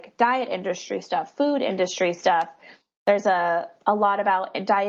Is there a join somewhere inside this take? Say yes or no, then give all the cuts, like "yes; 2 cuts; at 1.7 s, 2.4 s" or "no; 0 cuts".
no; 0 cuts